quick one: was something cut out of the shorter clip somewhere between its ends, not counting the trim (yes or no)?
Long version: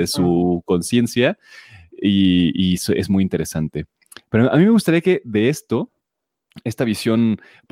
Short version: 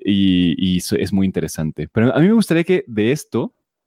yes